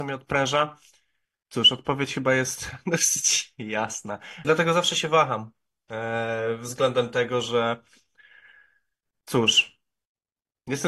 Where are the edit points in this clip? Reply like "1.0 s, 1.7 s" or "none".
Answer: 4.4 s